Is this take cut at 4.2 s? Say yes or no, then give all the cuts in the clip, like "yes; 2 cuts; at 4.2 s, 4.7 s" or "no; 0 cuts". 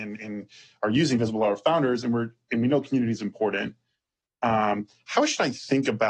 no; 0 cuts